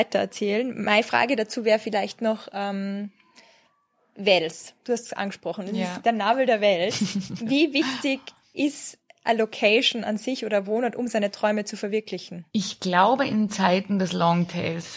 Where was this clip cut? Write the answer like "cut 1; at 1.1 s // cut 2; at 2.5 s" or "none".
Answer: cut 1; at 12.5 s